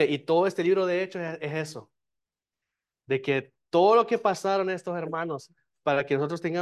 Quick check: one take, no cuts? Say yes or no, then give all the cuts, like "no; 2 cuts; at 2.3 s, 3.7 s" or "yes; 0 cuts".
yes; 0 cuts